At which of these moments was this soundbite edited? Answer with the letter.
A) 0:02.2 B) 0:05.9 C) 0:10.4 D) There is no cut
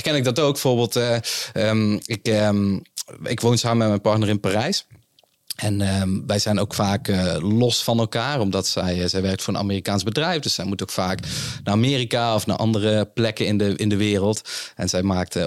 D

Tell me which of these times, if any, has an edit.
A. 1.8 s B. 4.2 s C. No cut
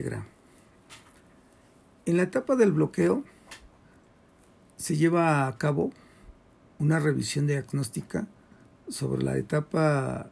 C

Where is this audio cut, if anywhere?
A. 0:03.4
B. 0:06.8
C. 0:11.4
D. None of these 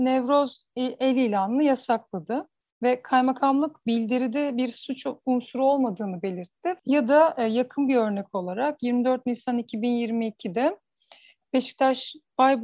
B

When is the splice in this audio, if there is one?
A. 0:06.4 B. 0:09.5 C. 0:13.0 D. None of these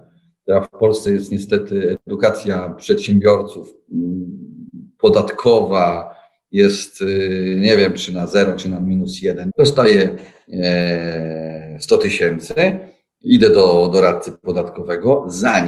B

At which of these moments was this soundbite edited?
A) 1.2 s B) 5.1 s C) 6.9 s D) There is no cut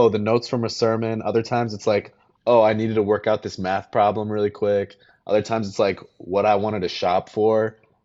D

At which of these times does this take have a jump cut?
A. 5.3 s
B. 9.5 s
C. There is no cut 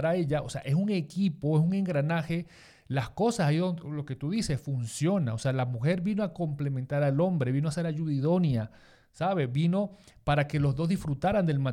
C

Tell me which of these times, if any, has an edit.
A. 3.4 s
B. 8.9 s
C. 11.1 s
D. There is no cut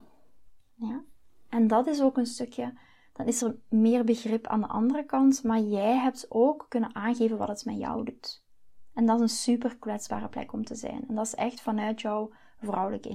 D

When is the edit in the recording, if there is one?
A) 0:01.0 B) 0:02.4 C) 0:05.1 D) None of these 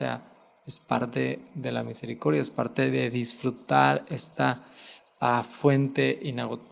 D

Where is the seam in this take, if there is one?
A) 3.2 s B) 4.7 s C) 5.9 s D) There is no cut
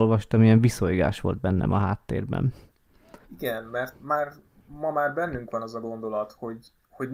A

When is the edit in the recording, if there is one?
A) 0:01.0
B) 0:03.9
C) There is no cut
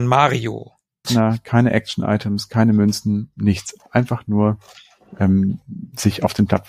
A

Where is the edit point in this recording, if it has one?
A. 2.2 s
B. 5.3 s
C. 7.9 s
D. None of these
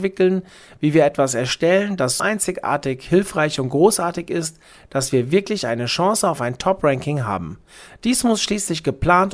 A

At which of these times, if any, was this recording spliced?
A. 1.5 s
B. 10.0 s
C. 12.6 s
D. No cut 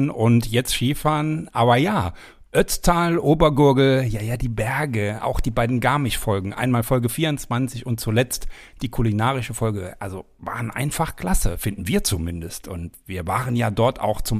D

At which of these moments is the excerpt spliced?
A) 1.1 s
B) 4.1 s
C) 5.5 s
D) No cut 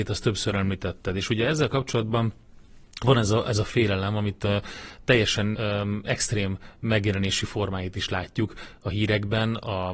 C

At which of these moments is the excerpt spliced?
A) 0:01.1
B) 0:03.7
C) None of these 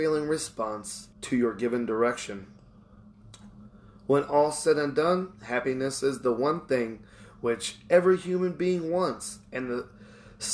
A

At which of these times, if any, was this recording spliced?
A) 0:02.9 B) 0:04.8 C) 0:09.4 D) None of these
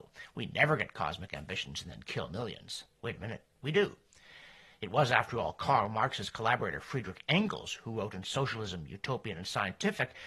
A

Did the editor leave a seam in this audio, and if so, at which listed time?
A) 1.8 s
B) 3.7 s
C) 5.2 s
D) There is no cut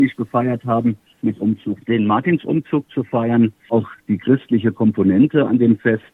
B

